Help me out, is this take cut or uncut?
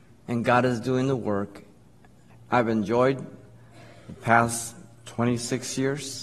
cut